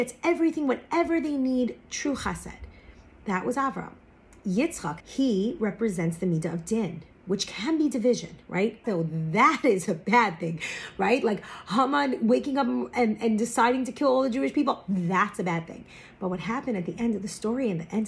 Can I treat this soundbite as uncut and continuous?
no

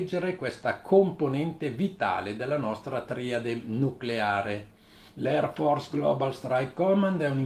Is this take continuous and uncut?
no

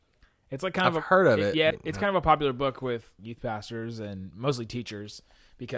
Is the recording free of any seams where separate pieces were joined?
no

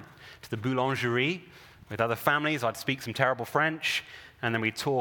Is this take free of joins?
yes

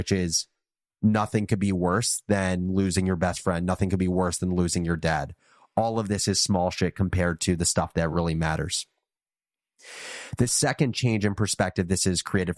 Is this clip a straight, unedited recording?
yes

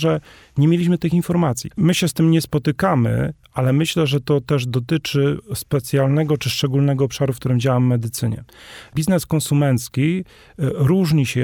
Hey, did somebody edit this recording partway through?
yes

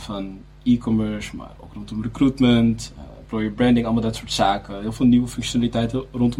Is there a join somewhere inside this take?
no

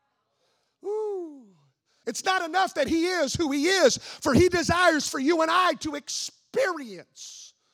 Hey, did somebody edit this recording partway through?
yes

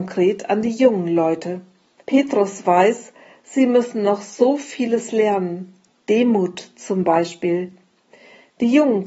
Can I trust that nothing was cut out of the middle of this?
no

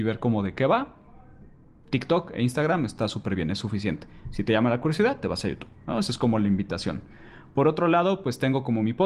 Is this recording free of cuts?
yes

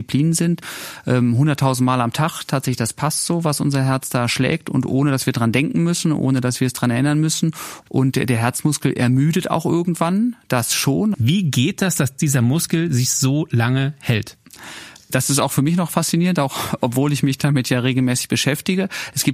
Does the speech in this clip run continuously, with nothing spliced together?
no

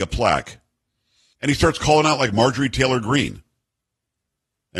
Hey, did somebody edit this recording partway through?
yes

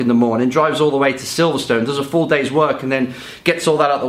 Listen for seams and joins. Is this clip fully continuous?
yes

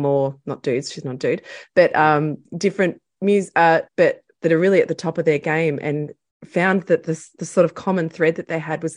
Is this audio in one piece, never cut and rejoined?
no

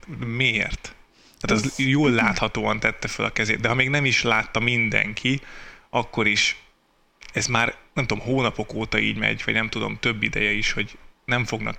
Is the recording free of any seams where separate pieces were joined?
yes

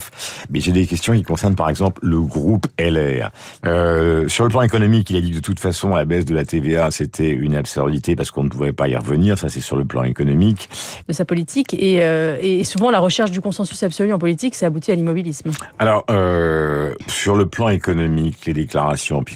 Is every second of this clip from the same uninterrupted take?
no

